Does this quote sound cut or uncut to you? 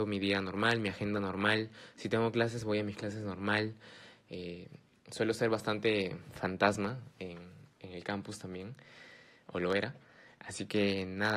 uncut